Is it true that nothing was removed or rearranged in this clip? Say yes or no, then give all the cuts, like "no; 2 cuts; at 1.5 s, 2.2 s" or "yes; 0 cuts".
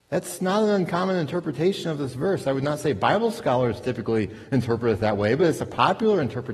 yes; 0 cuts